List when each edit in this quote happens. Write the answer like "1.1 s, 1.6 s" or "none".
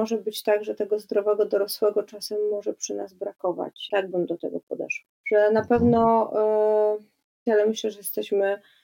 3.9 s, 5.2 s, 7.5 s